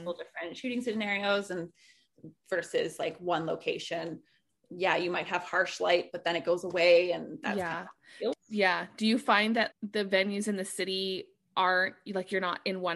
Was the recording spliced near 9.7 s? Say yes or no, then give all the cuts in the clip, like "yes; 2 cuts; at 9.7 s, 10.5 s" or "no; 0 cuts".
yes; 2 cuts; at 8.3 s, 9.7 s